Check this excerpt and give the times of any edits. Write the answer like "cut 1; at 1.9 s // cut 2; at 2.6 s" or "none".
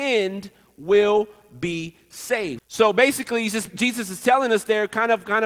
cut 1; at 2.6 s // cut 2; at 3.7 s

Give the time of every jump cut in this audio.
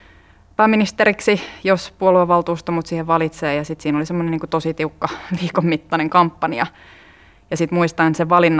none

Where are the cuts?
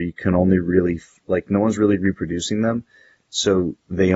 none

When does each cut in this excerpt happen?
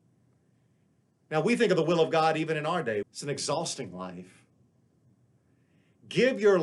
cut 1; at 3.0 s

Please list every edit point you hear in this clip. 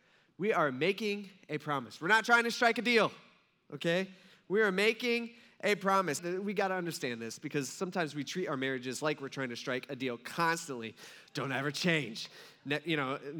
cut 1; at 6.2 s // cut 2; at 11.3 s

